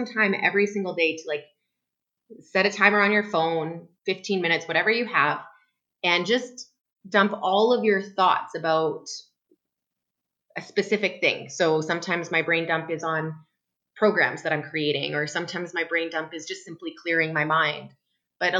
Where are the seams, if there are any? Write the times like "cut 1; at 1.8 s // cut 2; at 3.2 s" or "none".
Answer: cut 1; at 4.0 s